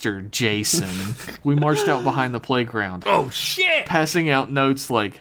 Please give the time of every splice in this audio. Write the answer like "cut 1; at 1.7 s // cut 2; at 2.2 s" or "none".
cut 1; at 1.4 s // cut 2; at 3.0 s